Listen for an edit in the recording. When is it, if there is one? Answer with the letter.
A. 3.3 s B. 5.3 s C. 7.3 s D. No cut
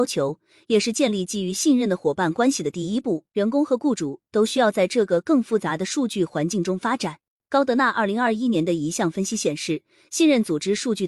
A